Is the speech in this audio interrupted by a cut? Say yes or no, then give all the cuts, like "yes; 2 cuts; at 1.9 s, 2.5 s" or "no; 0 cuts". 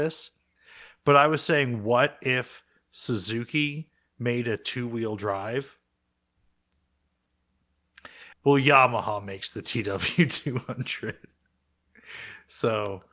yes; 1 cut; at 8.3 s